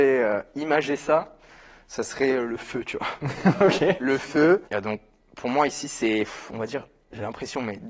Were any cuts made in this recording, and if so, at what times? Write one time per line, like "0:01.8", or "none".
0:04.6